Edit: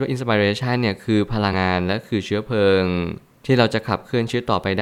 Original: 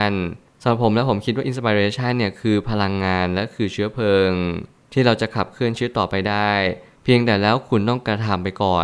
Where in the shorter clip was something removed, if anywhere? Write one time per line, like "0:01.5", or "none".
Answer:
0:01.5

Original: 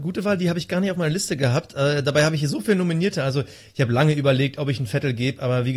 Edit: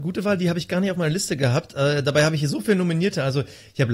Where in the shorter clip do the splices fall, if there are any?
none

